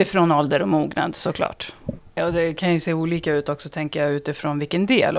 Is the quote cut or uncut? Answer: cut